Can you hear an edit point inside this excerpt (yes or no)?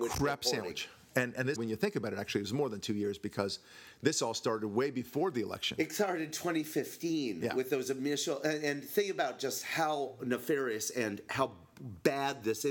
yes